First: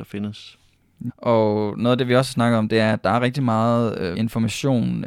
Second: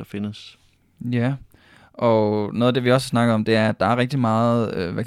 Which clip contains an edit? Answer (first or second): first